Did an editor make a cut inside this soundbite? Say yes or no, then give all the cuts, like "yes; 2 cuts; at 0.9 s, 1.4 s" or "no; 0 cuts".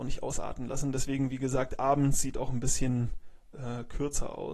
no; 0 cuts